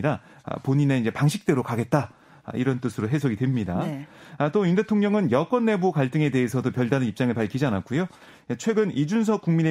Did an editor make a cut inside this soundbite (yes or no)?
no